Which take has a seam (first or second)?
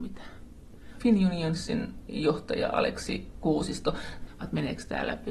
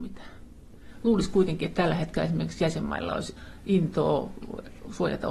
first